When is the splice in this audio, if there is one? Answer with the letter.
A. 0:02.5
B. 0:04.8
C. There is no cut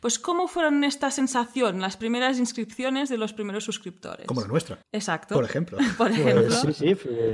B